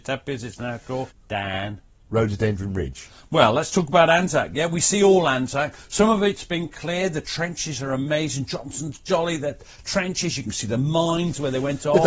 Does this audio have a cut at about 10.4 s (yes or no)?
no